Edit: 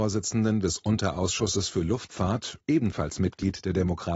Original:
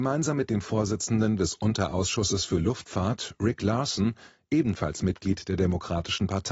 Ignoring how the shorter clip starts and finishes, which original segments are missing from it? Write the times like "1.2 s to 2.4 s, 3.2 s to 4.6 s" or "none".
3.4 s to 4.4 s

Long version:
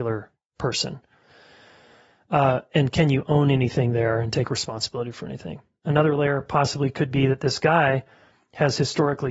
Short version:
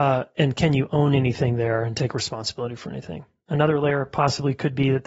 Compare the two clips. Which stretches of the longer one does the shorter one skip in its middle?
none

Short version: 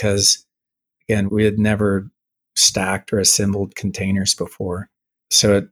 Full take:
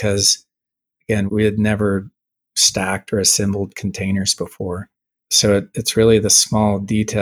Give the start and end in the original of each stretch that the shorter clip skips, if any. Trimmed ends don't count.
none

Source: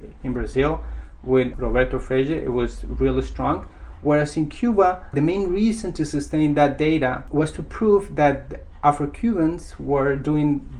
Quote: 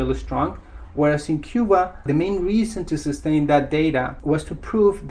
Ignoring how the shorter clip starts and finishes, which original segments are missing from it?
none

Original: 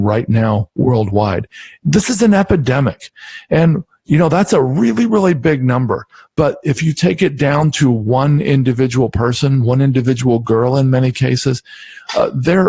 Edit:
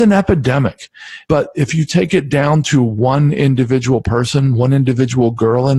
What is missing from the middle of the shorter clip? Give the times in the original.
3.5 s to 6.3 s

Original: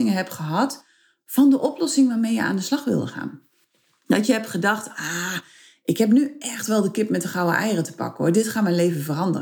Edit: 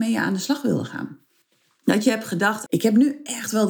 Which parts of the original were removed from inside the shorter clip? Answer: 4.9 s to 5.8 s

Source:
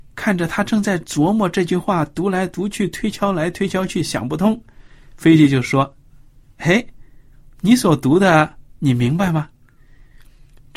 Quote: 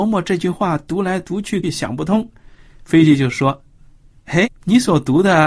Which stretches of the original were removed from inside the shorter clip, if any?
2.9 s to 3.9 s, 6.8 s to 7.4 s

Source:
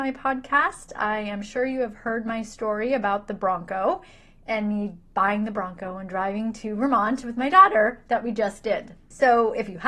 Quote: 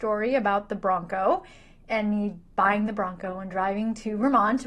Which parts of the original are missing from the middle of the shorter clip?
none

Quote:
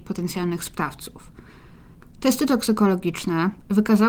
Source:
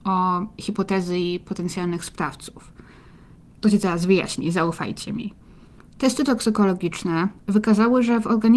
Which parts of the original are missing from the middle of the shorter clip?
3.4 s to 5.8 s

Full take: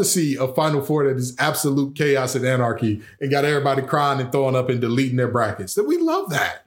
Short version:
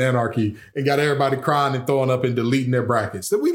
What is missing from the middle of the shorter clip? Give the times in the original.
none

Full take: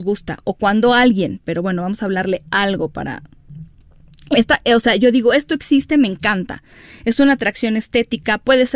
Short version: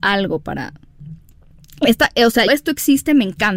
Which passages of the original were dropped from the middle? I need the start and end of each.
5.0 s to 5.3 s

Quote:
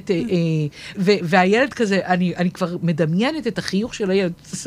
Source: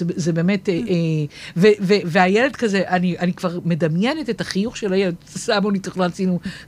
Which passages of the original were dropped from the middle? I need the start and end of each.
1.5 s to 1.8 s

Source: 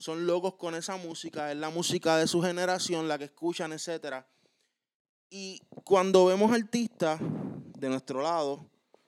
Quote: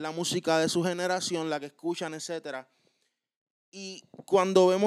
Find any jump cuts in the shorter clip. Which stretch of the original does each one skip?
none

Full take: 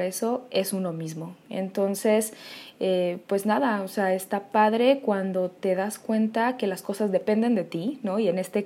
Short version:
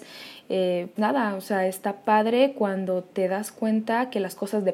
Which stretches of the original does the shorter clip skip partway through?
3.3 s to 3.4 s

